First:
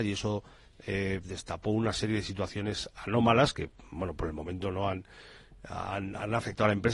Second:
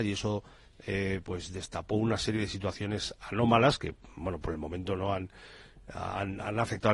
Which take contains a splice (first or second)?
first